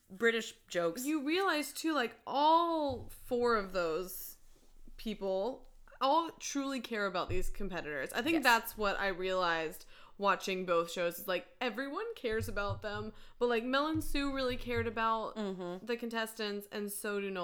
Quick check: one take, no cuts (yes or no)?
yes